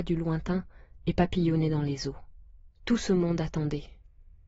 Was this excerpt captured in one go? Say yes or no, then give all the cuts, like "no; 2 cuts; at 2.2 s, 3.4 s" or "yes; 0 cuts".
no; 1 cut; at 2.7 s